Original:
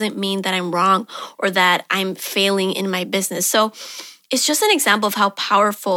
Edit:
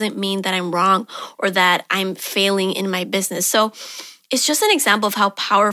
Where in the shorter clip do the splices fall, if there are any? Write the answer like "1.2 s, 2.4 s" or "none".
none